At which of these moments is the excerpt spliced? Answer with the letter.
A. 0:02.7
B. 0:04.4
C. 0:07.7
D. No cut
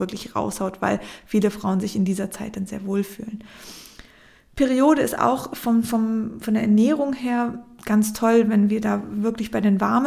A